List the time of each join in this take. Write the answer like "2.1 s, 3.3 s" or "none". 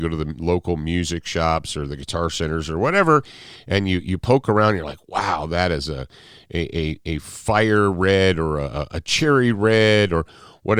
none